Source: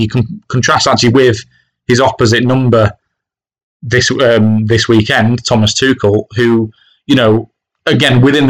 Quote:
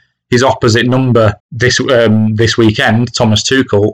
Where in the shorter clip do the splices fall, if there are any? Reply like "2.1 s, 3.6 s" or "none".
1.4 s